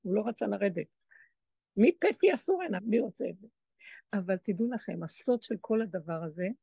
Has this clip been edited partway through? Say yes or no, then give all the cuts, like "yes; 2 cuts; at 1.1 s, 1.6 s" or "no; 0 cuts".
yes; 1 cut; at 2.8 s